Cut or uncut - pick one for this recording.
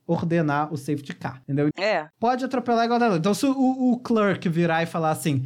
cut